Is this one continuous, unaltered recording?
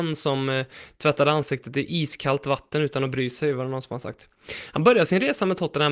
yes; 0 cuts

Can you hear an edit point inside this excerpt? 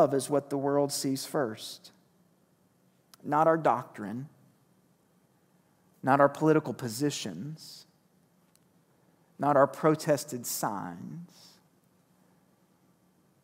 no; 0 cuts

